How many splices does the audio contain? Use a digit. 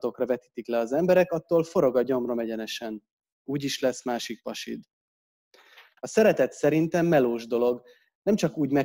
1